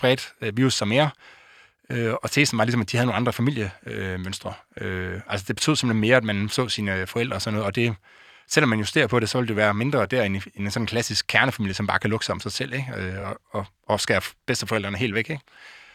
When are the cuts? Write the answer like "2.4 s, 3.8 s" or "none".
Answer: none

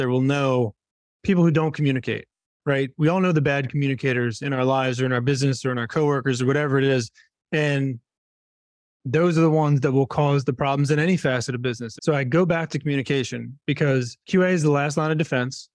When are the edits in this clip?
12.0 s, 14.2 s

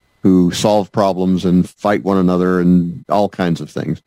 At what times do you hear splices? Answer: none

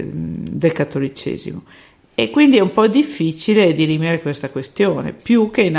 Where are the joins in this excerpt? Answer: none

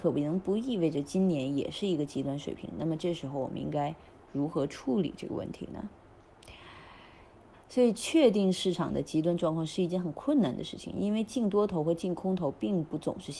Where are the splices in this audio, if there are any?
7.5 s

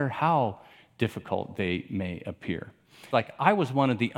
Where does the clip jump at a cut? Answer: 3.1 s

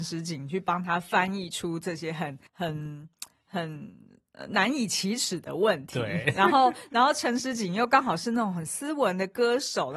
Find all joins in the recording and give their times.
2.5 s

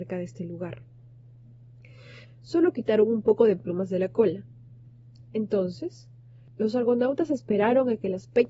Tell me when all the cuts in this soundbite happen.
2.2 s

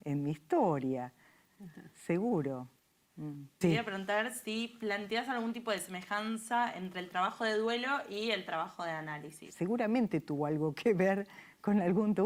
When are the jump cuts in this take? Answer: 3.6 s, 9.5 s

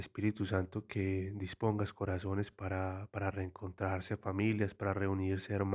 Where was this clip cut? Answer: none

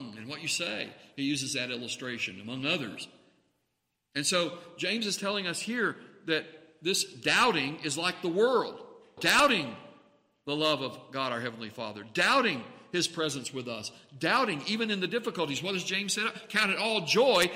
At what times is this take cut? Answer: 9.2 s

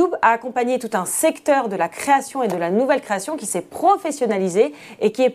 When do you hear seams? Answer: none

